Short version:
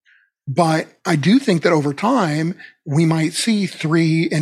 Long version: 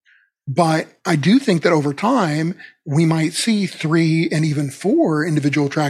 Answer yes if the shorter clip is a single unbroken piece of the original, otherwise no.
yes